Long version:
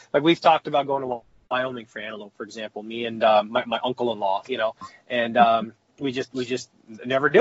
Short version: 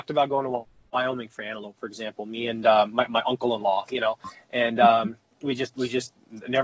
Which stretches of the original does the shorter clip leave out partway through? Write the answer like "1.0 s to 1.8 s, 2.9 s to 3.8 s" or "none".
none